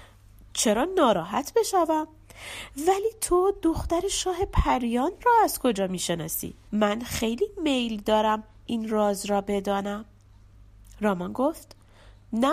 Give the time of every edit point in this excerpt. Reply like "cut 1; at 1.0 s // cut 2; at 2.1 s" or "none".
cut 1; at 6.7 s